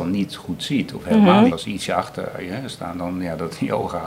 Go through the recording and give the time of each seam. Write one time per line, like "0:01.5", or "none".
0:01.5